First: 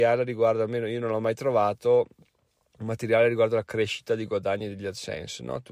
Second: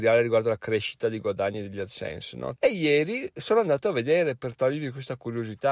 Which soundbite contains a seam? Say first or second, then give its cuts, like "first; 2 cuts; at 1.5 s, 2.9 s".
second; 1 cut; at 2.6 s